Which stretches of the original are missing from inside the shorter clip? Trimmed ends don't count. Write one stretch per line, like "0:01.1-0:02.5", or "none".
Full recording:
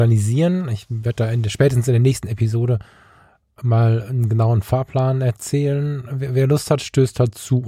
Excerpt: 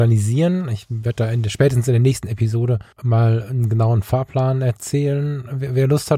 0:02.9-0:03.5